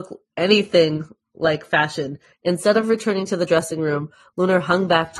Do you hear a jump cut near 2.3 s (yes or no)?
yes